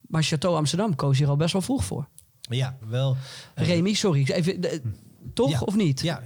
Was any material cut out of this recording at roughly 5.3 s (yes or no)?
no